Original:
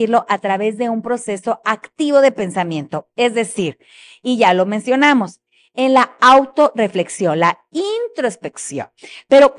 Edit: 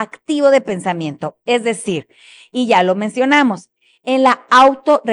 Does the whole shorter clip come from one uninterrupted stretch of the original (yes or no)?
yes